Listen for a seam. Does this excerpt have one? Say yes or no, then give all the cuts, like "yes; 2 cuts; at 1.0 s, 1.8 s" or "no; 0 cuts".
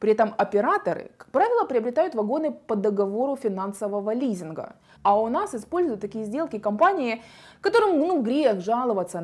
yes; 1 cut; at 5.0 s